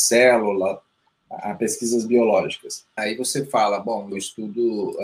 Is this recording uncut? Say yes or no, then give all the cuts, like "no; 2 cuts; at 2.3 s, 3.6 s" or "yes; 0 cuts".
no; 2 cuts; at 3.0 s, 4.1 s